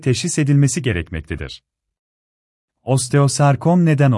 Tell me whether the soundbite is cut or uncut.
uncut